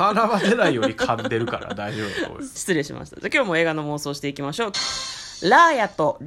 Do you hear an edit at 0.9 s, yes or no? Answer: no